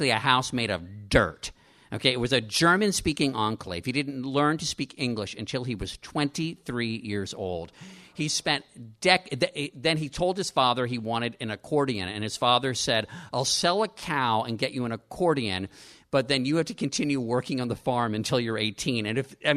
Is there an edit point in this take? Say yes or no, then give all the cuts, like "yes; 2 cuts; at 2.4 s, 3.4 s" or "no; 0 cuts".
no; 0 cuts